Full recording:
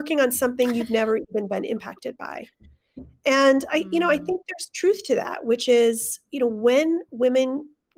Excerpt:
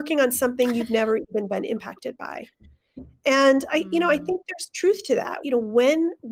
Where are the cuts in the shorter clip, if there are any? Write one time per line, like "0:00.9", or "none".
0:05.4

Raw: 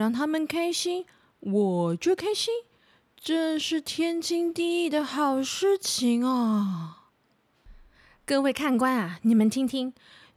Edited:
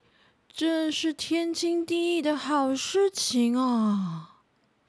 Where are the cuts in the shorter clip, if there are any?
none

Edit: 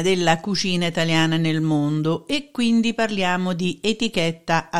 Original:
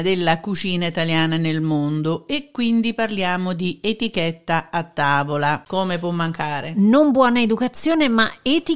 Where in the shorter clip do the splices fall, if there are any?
none

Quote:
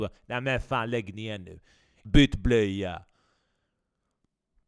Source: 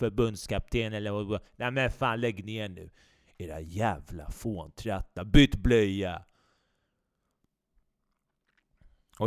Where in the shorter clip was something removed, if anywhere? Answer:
0:02.1

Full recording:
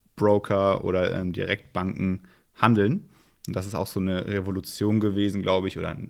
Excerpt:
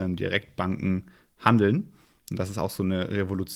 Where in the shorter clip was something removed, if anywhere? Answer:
none

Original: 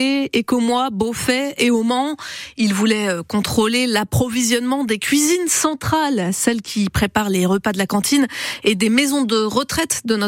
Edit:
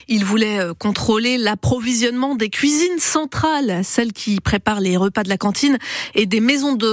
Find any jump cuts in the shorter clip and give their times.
none

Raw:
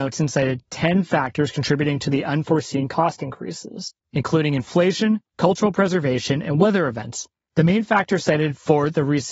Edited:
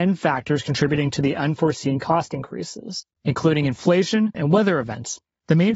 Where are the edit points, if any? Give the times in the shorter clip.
0:04.3

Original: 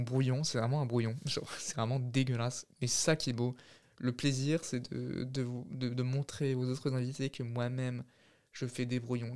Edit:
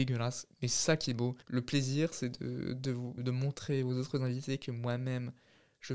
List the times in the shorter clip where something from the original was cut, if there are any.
0:01.4
0:03.2

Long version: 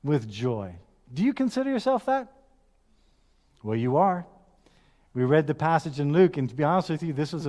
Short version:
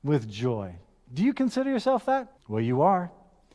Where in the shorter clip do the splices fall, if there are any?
0:02.4

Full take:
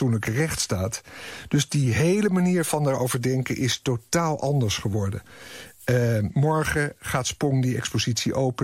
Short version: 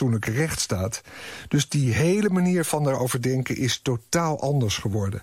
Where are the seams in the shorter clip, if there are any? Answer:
none

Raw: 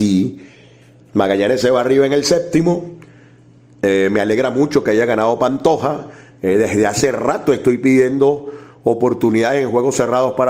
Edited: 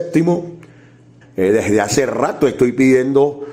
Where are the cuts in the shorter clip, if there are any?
0:01.2

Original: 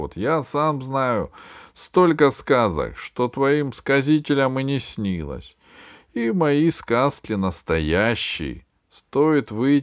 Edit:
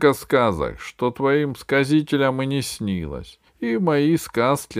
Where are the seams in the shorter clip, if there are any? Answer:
0:03.5

